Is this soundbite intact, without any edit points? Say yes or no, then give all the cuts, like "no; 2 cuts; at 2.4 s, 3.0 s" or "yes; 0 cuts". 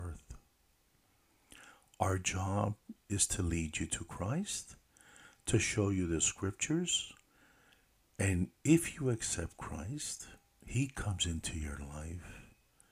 yes; 0 cuts